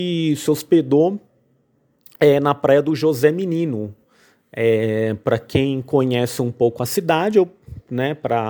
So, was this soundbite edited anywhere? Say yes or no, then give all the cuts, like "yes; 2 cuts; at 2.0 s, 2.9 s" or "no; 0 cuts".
no; 0 cuts